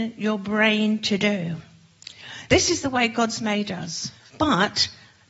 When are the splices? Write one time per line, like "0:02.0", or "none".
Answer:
0:02.5
0:04.3